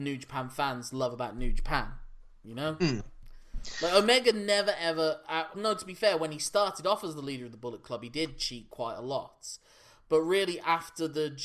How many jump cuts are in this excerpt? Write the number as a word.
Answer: one